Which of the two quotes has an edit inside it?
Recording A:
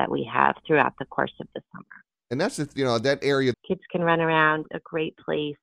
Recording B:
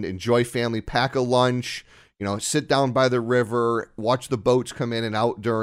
A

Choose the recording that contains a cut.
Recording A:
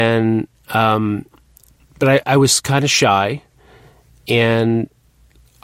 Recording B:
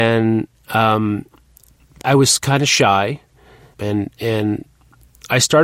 B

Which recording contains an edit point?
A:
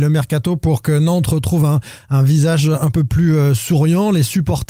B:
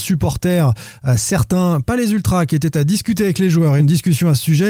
B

